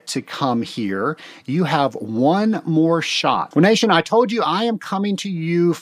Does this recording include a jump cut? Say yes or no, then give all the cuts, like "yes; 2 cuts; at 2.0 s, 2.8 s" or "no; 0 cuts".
yes; 1 cut; at 3.5 s